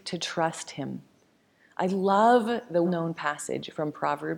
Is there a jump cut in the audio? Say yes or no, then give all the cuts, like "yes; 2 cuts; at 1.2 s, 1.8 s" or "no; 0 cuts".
yes; 1 cut; at 2.8 s